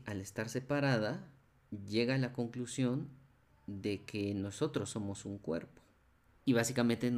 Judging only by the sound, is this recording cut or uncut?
cut